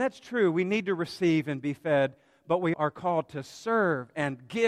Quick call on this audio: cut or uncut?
cut